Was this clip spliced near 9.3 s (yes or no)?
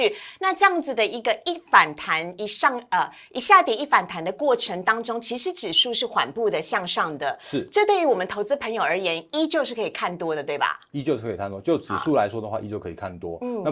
no